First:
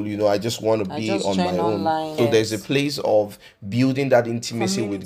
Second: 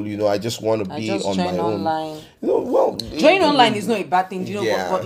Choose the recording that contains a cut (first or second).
first